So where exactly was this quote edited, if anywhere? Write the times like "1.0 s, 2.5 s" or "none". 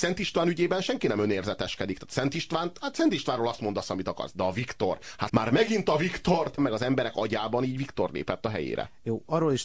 5.3 s, 6.6 s